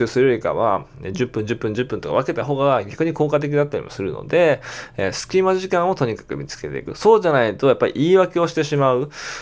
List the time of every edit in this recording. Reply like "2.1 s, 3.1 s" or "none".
none